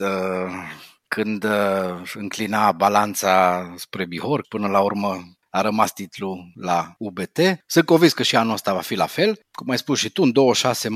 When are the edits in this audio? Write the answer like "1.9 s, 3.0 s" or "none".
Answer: 4.4 s